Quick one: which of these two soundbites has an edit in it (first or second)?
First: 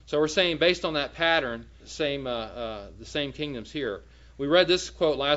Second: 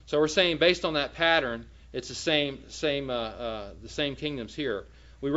first